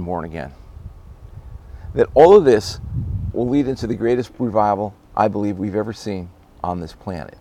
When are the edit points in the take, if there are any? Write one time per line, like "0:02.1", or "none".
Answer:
0:03.3
0:05.0